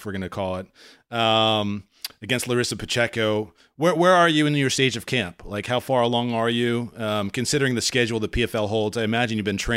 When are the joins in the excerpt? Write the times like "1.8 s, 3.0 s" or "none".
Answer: none